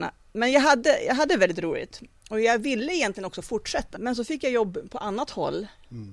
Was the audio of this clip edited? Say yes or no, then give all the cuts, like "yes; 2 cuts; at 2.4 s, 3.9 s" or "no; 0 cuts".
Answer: yes; 1 cut; at 3.9 s